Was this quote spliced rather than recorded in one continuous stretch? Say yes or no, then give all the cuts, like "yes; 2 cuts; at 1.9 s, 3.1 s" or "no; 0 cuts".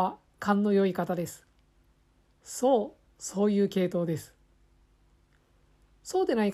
no; 0 cuts